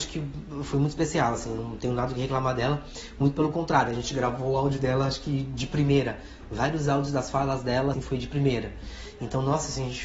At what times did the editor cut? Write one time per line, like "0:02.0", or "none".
0:07.9